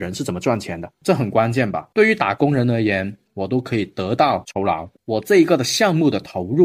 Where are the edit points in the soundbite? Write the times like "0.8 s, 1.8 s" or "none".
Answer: 1.9 s, 3.3 s, 5.0 s